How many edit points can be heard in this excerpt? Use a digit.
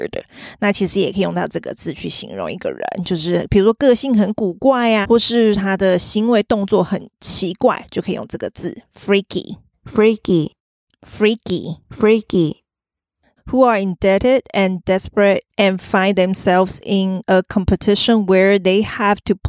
2